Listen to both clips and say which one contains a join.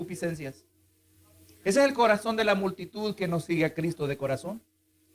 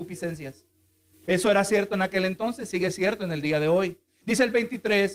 second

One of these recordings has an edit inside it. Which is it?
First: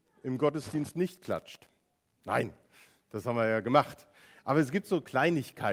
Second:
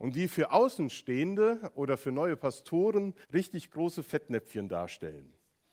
second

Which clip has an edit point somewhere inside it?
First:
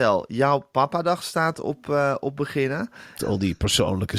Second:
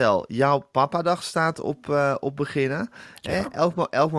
first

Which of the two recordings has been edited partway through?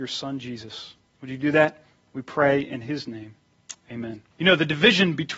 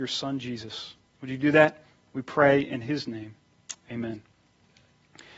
first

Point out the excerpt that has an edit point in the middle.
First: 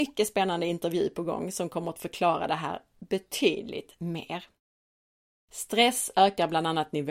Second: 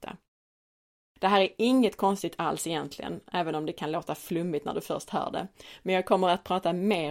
first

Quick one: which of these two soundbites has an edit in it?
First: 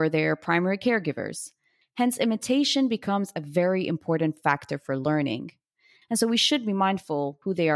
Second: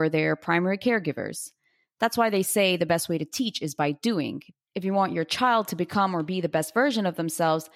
first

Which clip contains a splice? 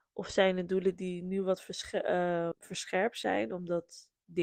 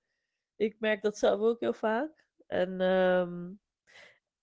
first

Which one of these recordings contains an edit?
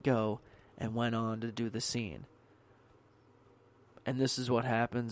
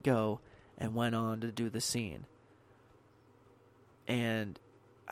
first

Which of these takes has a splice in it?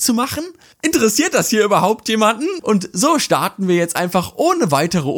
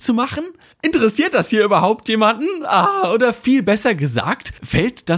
first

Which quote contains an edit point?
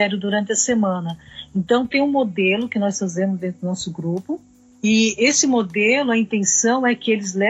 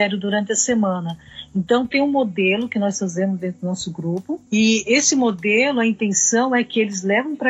second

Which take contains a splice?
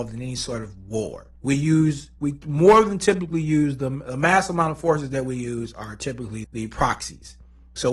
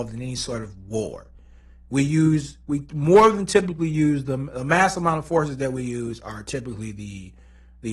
first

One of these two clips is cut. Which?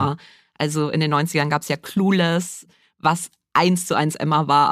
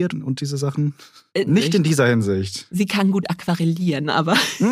second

